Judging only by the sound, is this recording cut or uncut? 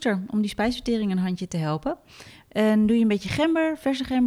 uncut